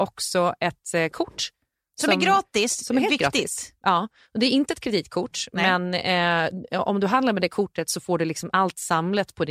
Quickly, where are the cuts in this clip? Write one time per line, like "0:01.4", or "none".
none

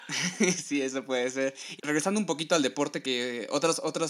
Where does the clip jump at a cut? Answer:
0:01.8
0:03.0

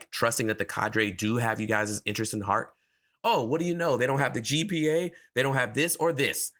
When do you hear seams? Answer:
0:03.2

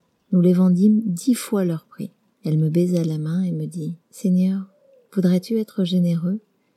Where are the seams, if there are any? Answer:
0:02.3
0:04.0

